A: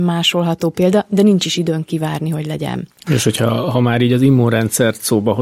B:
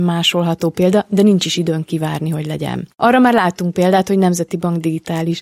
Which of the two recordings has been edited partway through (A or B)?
B